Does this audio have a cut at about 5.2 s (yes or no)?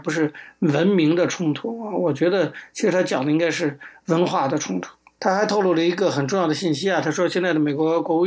yes